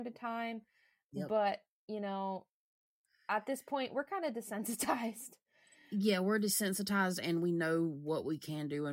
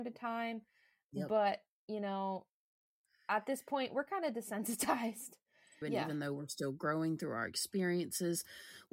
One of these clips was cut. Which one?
second; 1 cut; at 5.8 s

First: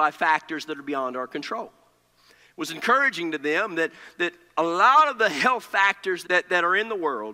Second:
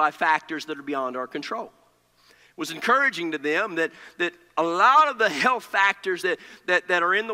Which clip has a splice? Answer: first; 1 cut; at 6.2 s

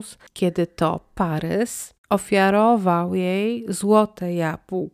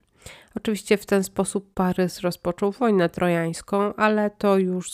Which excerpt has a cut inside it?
first; 1 cut; at 2.0 s

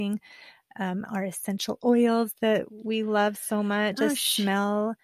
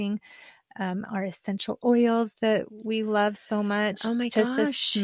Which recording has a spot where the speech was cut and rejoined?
first; 1 cut; at 4.0 s

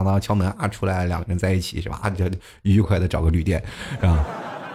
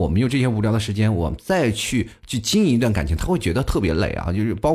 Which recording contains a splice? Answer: first; 1 cut; at 2.8 s

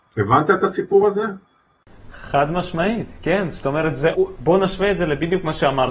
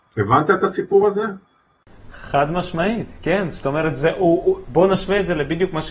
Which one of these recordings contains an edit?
first; 1 cut; at 4.1 s

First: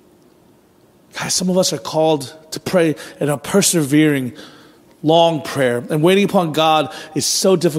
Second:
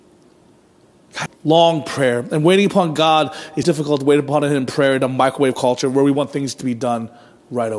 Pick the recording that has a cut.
second; 2 cuts; at 1.3 s, 3.6 s

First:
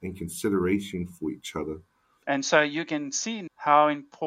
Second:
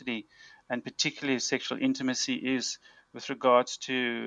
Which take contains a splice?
first; 1 cut; at 2.2 s

